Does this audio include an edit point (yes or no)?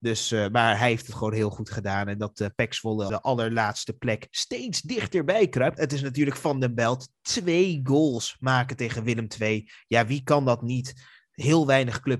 yes